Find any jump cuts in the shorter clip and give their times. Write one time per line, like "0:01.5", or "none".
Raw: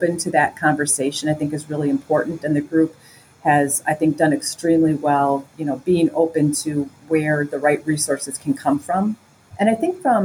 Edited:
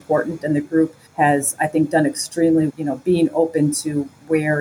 0:01.1
0:02.7